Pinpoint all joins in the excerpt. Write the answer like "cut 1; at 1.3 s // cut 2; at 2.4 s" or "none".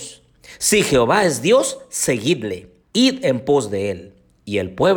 cut 1; at 2.8 s